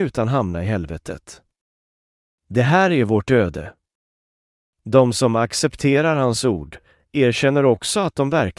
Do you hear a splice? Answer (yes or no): no